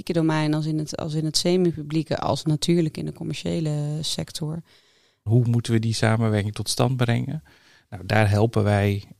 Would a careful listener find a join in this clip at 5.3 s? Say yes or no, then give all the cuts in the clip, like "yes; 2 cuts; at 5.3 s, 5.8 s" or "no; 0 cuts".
yes; 1 cut; at 5.3 s